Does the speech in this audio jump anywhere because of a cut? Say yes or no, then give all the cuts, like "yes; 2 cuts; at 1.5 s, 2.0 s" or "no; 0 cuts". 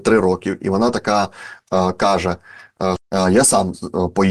yes; 1 cut; at 3.0 s